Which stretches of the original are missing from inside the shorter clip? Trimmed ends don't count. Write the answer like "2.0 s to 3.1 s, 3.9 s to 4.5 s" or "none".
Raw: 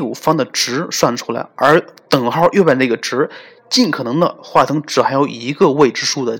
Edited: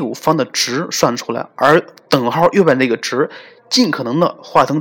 none